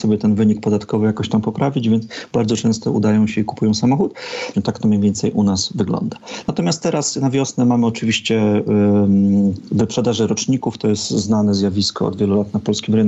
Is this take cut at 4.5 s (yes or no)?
yes